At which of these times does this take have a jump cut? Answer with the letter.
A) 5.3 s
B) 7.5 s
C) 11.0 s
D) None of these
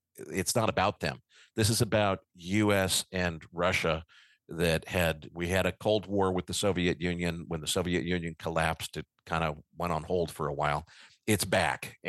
A